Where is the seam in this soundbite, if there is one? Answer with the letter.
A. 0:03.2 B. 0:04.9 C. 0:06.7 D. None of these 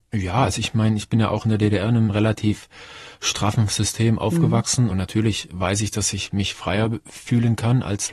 B